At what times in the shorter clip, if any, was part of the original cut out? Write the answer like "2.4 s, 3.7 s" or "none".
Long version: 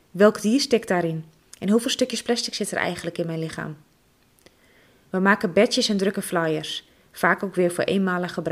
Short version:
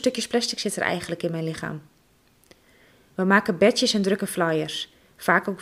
none